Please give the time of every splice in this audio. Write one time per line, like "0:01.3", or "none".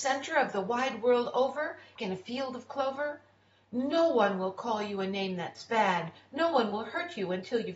0:02.0